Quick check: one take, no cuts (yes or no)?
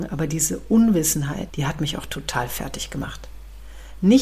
no